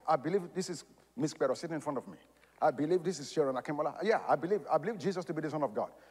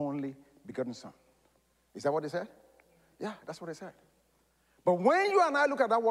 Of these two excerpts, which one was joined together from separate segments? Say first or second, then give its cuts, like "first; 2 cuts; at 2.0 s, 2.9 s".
second; 1 cut; at 1.9 s